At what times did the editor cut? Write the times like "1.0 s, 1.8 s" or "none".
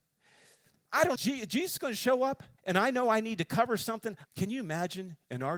1.2 s, 2.6 s, 4.3 s